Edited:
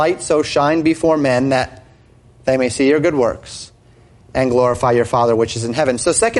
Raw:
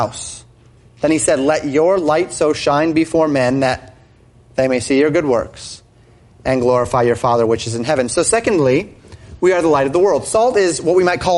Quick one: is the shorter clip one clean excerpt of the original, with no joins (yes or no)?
yes